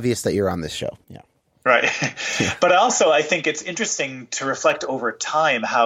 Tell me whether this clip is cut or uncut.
uncut